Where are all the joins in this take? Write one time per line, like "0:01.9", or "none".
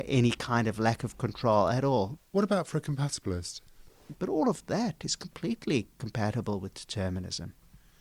0:02.2
0:04.1